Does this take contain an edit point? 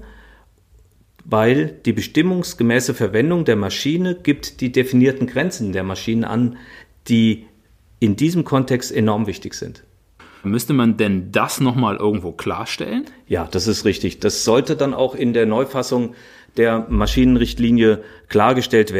yes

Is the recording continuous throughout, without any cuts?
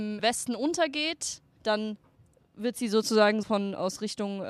no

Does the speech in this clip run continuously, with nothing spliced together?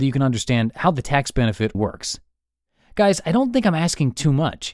no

